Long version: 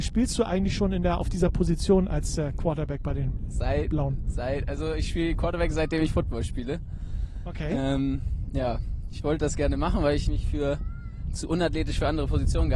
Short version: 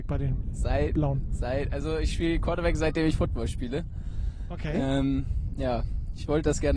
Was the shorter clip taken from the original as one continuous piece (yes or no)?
yes